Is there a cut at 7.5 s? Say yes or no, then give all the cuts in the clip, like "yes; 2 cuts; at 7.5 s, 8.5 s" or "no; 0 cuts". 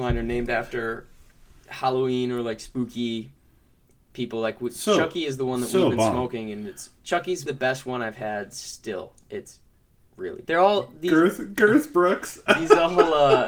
yes; 2 cuts; at 7.5 s, 10.5 s